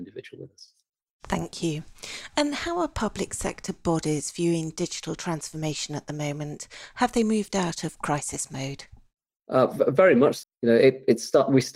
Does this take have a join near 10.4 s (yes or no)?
yes